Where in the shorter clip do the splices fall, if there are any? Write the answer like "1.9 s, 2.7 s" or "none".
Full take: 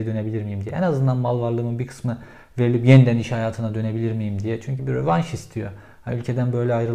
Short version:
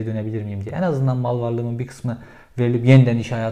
none